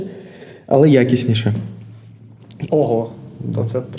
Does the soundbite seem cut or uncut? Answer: cut